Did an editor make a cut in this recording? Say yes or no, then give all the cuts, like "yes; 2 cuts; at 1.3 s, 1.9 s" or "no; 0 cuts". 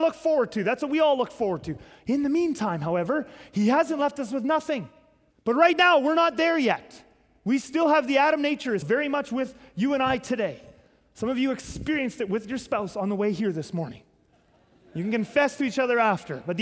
yes; 2 cuts; at 5.3 s, 8.8 s